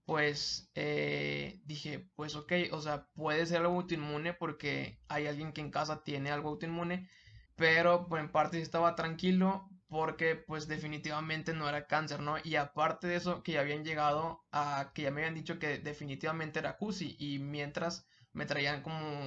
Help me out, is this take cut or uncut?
cut